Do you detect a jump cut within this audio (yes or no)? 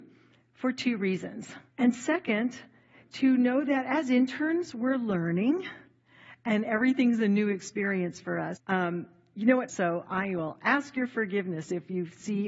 yes